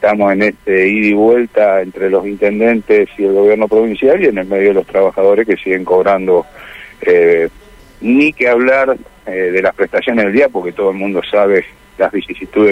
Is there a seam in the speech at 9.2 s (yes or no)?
no